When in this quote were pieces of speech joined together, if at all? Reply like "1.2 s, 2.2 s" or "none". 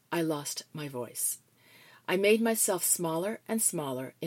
none